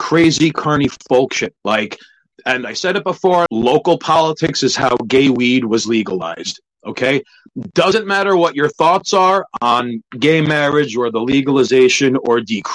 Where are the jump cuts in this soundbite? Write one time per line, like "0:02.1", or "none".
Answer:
0:01.6
0:03.5